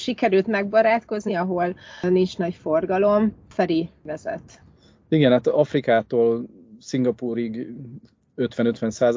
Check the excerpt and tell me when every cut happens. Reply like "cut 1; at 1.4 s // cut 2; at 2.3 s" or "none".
cut 1; at 1.3 s